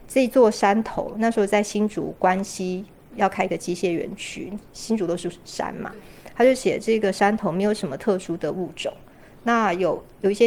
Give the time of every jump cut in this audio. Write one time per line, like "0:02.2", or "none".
none